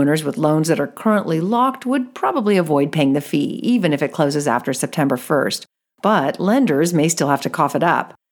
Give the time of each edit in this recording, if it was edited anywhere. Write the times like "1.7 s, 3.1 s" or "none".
none